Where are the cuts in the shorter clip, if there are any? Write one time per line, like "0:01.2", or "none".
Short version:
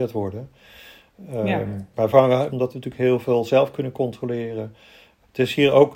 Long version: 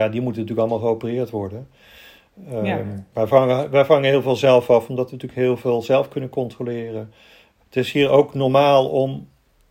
0:02.5